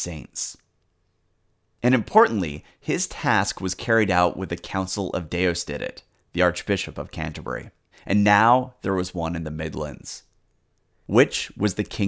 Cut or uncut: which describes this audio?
cut